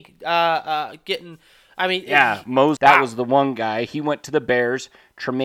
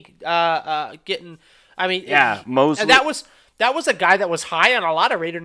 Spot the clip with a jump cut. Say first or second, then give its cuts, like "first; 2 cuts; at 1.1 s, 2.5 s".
first; 1 cut; at 2.8 s